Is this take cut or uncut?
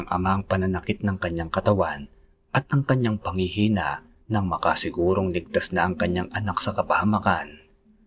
cut